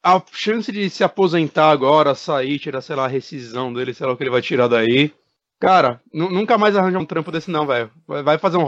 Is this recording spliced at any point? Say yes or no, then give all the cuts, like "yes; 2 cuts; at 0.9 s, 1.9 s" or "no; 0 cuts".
yes; 1 cut; at 7.0 s